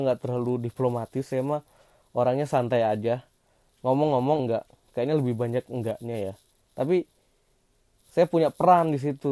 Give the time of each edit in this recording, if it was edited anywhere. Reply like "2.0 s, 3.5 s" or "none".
4.4 s